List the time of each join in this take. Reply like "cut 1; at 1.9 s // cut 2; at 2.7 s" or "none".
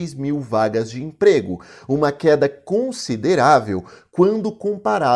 none

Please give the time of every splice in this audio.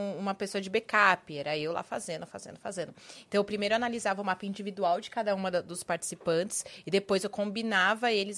none

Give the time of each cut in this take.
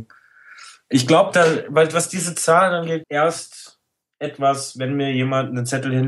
cut 1; at 3.0 s

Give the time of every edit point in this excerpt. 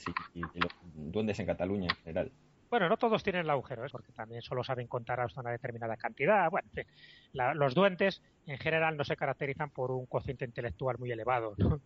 cut 1; at 3.9 s

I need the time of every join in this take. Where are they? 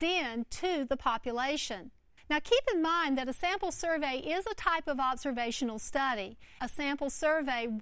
cut 1; at 2.2 s // cut 2; at 6.6 s

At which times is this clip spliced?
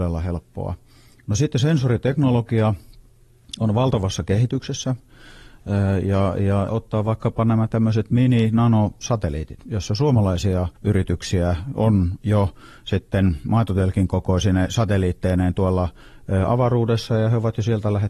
cut 1; at 6.7 s // cut 2; at 10.8 s

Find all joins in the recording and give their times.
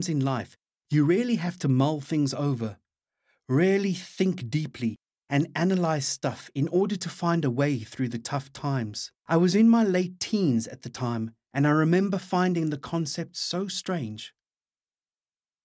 cut 1; at 9.2 s

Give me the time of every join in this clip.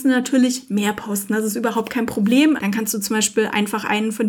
cut 1; at 2.6 s

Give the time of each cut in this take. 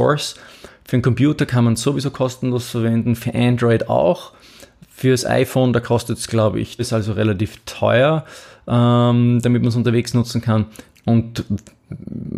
cut 1; at 6.8 s // cut 2; at 10.9 s

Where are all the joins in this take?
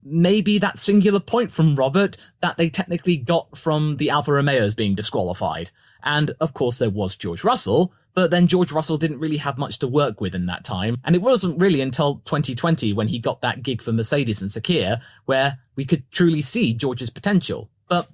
none

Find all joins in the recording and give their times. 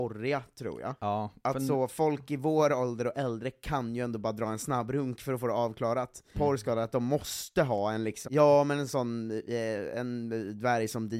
cut 1; at 1.0 s // cut 2; at 6.3 s // cut 3; at 8.2 s

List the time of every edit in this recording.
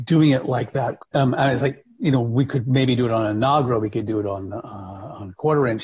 cut 1; at 1.0 s

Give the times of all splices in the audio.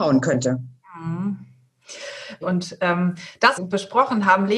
cut 1; at 2.4 s // cut 2; at 3.6 s

